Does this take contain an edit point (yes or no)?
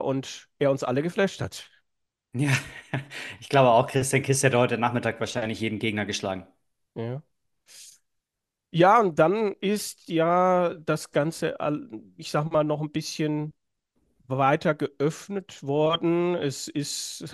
no